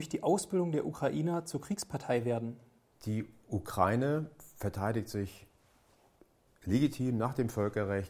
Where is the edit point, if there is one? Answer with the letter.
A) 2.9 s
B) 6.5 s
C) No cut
A